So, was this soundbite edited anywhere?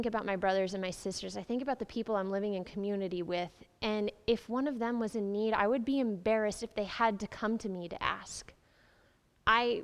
no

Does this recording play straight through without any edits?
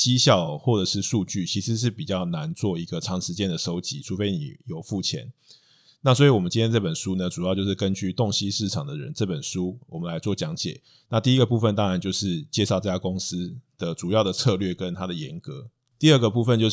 yes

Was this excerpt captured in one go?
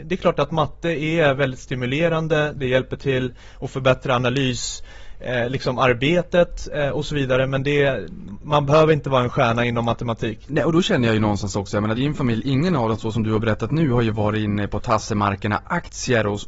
no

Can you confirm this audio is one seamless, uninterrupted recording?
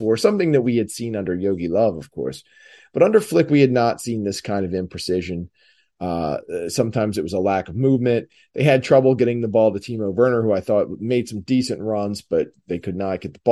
yes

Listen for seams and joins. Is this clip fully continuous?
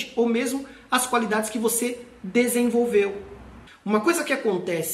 no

